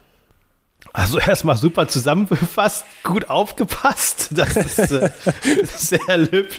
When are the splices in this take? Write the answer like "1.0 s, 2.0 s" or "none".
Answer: 5.7 s